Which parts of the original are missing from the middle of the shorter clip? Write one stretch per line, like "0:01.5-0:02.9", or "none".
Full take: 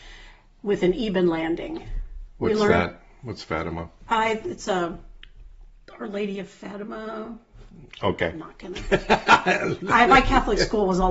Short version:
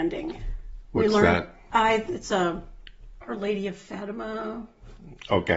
0:03.2-0:04.1
0:05.6-0:05.9